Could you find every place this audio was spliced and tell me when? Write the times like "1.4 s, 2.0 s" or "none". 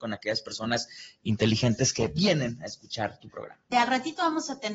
3.7 s